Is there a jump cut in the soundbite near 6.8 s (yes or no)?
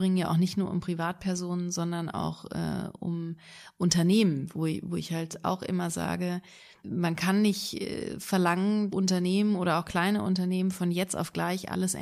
yes